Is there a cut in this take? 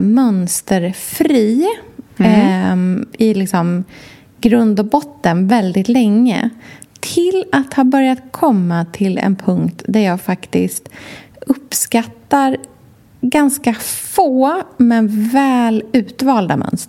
yes; 1 cut; at 3.1 s

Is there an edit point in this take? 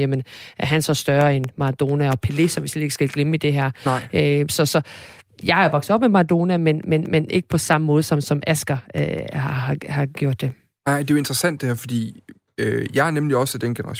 no; 0 cuts

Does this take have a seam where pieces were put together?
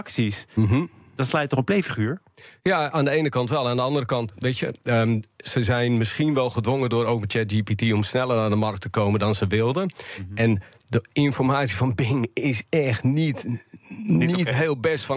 no; 0 cuts

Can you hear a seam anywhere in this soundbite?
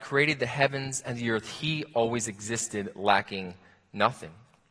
no; 0 cuts

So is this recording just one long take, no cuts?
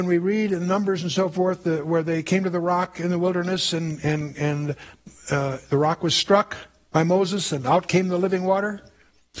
yes; 0 cuts

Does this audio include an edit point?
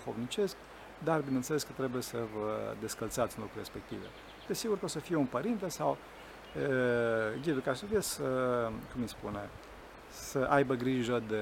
yes; 2 cuts; at 4.5 s, 8.0 s

